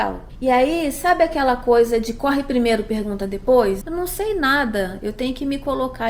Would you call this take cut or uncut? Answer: cut